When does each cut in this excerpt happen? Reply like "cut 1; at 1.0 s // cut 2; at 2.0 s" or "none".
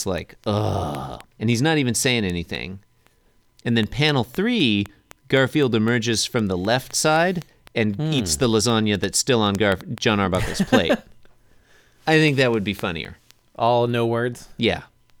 cut 1; at 1.4 s